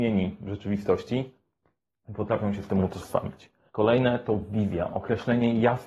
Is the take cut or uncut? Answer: cut